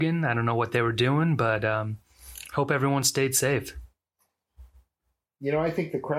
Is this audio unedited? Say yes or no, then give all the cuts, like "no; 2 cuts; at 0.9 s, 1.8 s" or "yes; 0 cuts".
yes; 0 cuts